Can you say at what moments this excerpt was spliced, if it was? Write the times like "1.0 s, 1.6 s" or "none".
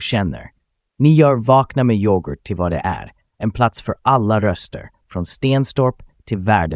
none